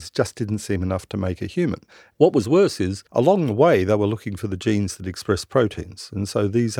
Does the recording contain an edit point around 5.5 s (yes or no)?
no